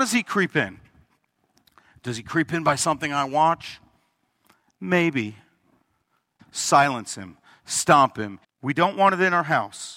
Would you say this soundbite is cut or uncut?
cut